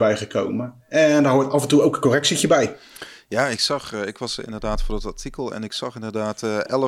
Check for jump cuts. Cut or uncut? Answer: uncut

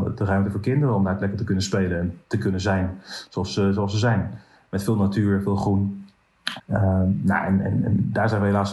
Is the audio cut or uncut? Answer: cut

